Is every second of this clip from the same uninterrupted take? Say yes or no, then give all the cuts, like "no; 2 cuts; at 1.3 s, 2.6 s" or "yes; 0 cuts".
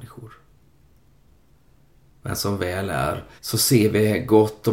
no; 1 cut; at 3.4 s